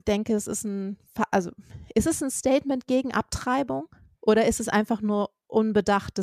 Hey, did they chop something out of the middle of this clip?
no; 0 cuts

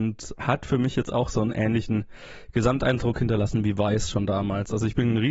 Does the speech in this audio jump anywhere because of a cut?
no; 0 cuts

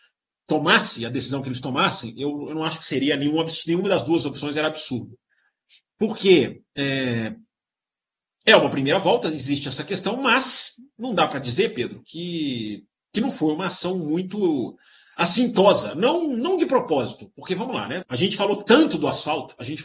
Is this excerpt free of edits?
no; 1 cut; at 18.0 s

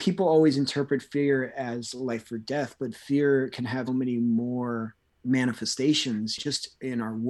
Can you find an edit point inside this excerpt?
yes; 1 cut; at 3.9 s

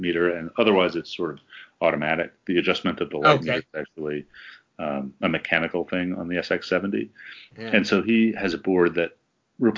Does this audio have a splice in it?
no; 0 cuts

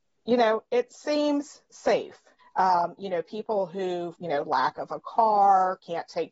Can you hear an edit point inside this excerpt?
yes; 2 cuts; at 2.4 s, 4.1 s

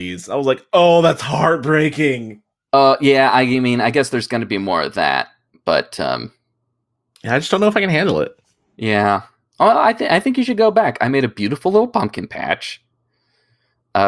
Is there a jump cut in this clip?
no; 0 cuts

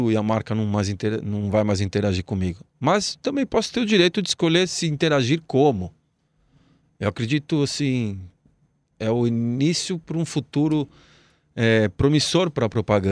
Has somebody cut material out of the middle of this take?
no; 0 cuts

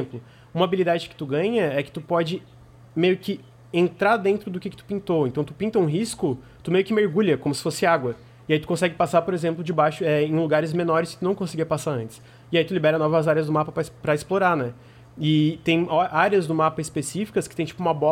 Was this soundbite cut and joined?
no; 0 cuts

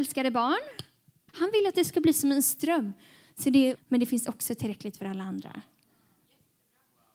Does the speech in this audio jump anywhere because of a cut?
yes; 2 cuts; at 1.3 s, 3.8 s

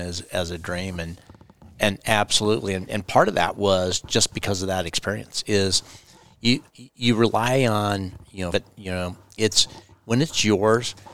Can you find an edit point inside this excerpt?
yes; 2 cuts; at 6.7 s, 8.5 s

